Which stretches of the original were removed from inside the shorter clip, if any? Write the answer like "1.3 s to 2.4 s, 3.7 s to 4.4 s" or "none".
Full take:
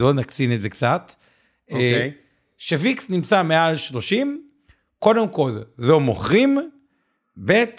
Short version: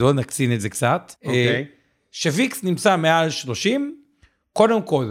1.2 s to 1.6 s